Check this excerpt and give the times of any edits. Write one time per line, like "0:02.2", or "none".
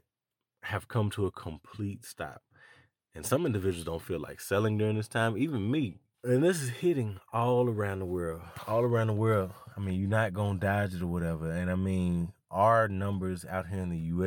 none